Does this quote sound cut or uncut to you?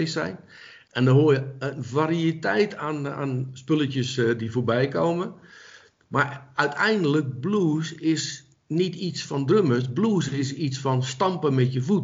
uncut